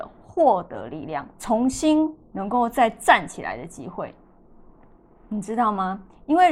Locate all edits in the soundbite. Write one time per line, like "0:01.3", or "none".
0:01.3